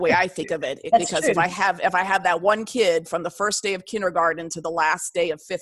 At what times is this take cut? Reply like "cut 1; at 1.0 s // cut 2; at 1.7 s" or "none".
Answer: none